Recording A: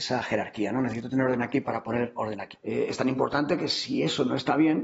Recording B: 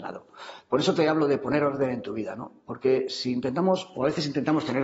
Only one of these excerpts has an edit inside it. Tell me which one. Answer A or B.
A